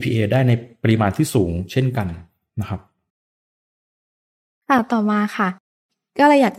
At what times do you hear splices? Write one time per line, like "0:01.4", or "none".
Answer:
none